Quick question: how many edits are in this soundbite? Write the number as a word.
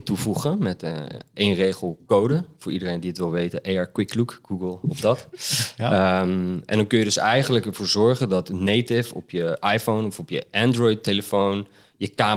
one